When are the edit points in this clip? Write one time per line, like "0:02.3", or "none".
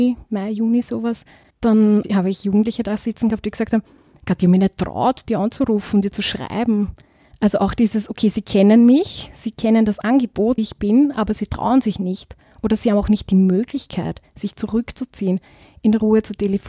0:10.6